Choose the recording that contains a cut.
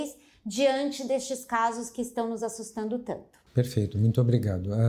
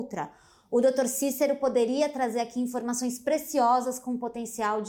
first; 1 cut; at 3.5 s

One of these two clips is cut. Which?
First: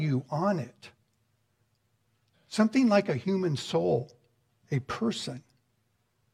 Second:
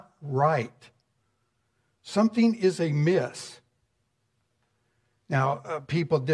first; 1 cut; at 2.3 s

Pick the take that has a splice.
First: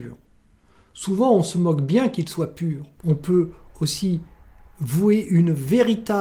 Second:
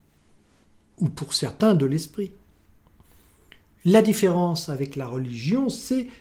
first; 1 cut; at 3.0 s

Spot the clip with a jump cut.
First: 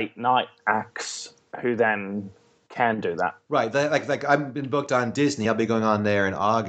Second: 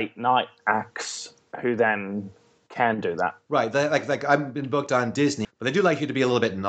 second; 1 cut; at 5.4 s

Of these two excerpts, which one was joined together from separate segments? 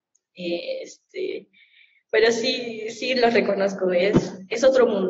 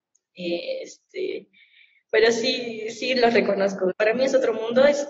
second; 1 cut; at 3.9 s

